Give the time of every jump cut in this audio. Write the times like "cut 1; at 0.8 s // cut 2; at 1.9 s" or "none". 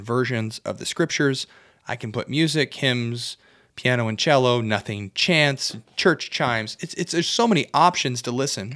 none